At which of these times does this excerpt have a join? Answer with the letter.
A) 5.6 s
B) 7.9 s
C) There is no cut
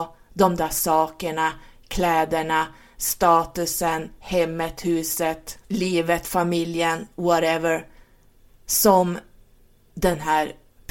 A